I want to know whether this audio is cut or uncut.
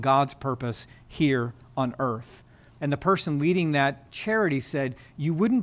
cut